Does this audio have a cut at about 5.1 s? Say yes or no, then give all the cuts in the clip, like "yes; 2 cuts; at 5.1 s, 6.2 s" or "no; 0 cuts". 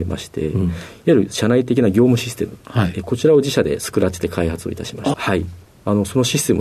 yes; 1 cut; at 5.1 s